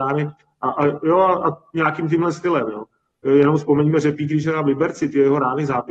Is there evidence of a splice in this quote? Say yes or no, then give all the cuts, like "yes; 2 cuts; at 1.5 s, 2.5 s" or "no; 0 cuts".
no; 0 cuts